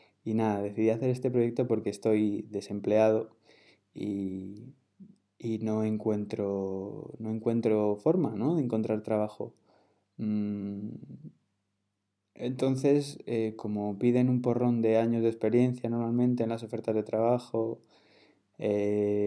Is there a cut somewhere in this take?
no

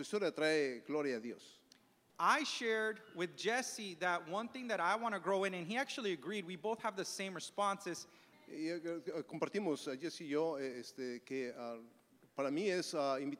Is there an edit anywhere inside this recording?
yes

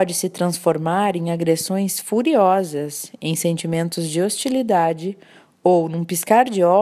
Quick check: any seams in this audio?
no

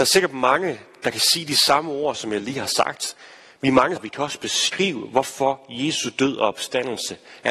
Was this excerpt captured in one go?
no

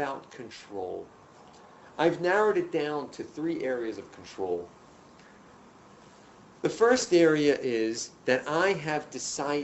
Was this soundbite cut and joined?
no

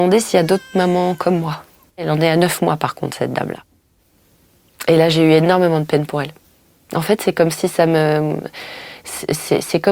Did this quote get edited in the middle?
yes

